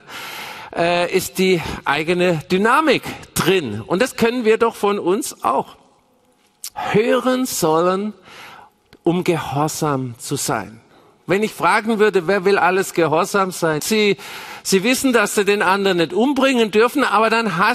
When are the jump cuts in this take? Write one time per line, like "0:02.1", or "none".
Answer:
0:06.7
0:13.8